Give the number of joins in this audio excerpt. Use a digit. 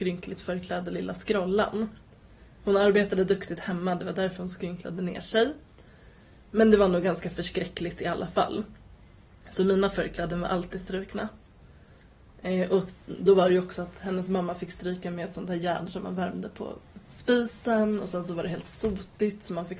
0